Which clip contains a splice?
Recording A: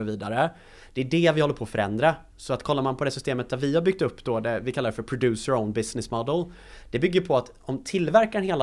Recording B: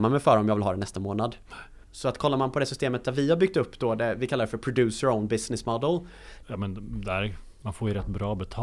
B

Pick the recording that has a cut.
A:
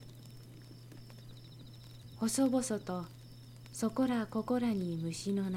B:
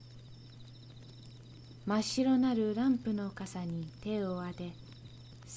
B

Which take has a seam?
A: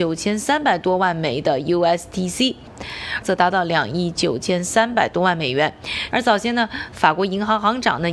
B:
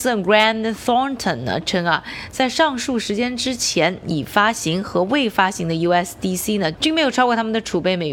A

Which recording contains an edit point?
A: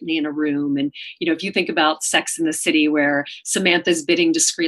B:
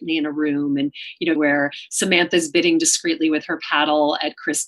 B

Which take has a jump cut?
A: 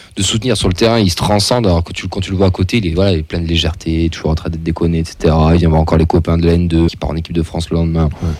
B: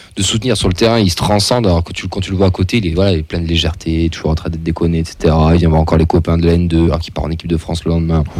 A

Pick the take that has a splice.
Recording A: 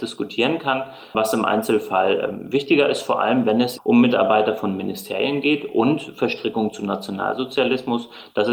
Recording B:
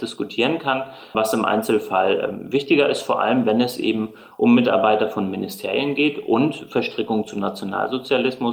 A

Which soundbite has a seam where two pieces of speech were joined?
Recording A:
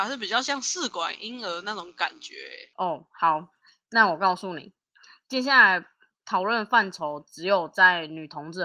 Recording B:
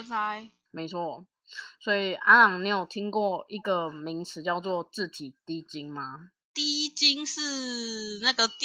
A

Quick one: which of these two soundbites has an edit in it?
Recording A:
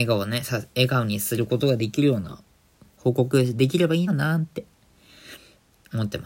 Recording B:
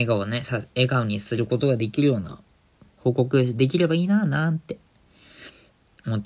A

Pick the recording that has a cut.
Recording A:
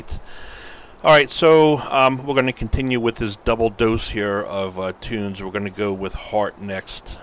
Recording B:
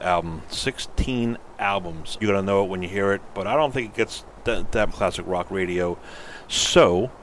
B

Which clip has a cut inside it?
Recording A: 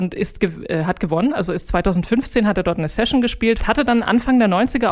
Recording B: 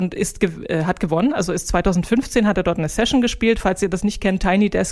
A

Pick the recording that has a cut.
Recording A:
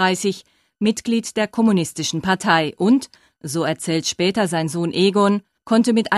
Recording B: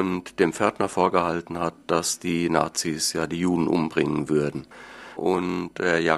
B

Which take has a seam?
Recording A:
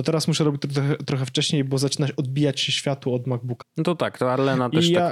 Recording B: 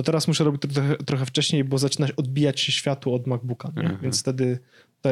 A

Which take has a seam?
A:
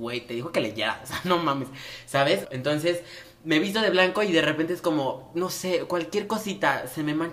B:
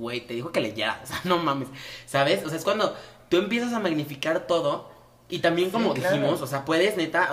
A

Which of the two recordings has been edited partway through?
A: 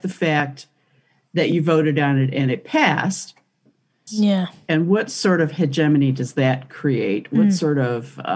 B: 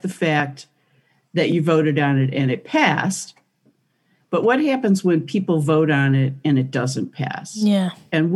A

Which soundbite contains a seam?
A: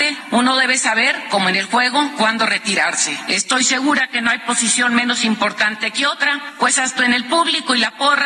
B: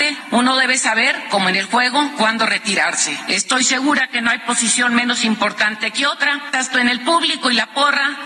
B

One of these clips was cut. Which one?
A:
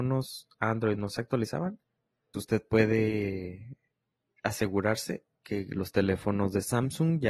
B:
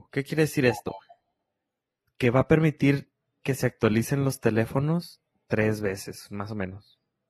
A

